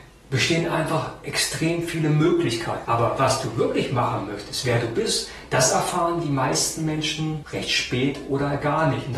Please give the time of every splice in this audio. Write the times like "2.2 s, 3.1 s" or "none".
2.8 s